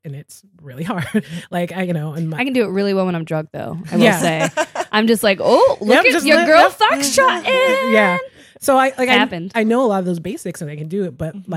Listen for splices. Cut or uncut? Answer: uncut